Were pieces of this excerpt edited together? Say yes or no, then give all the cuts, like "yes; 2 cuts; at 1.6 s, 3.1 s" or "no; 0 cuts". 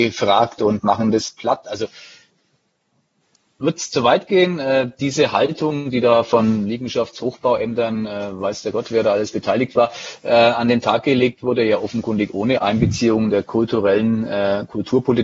no; 0 cuts